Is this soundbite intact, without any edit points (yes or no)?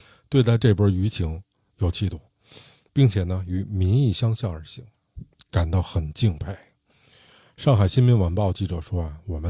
yes